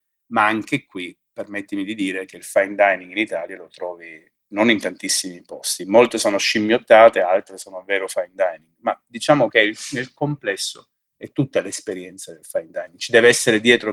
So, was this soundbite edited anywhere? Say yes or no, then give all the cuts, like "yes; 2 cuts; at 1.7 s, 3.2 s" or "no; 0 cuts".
no; 0 cuts